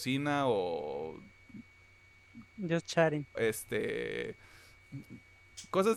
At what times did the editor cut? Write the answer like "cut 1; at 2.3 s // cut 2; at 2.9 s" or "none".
cut 1; at 3.3 s